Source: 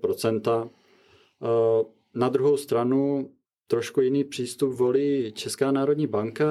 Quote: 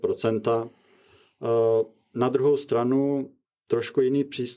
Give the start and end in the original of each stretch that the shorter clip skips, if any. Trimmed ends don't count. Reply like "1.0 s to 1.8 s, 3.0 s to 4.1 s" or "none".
none